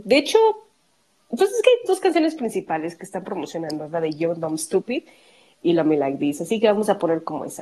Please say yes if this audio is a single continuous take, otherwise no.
yes